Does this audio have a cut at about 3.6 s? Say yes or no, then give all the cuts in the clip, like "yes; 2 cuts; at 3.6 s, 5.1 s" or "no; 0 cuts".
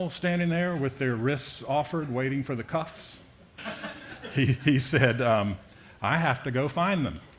yes; 1 cut; at 3.6 s